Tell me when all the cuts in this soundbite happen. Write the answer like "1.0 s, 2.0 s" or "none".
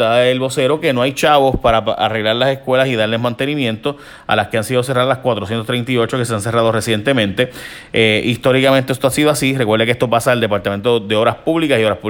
none